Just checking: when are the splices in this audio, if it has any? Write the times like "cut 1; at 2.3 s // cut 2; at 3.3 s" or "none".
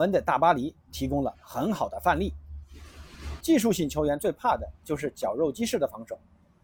cut 1; at 3.4 s